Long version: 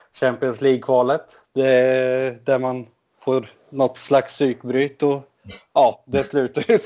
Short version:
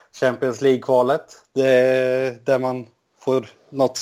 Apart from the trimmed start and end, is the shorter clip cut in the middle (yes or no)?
no